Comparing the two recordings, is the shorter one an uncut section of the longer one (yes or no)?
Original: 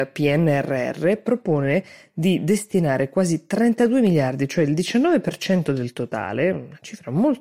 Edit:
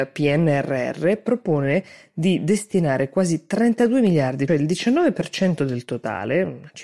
no